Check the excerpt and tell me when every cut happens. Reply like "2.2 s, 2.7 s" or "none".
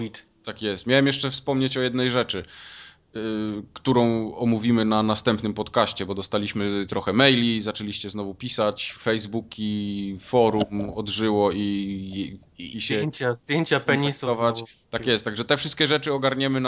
12.7 s